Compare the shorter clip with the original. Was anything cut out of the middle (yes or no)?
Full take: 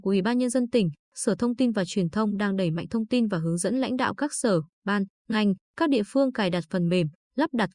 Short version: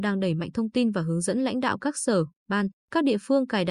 yes